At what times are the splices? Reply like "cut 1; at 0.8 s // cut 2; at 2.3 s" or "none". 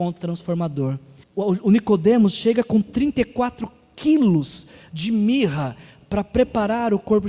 cut 1; at 1.2 s